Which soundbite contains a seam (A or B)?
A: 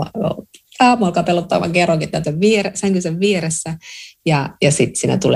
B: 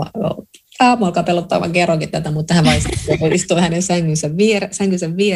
A